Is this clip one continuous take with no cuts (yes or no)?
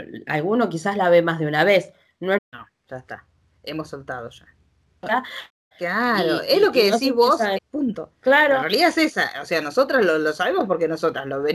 no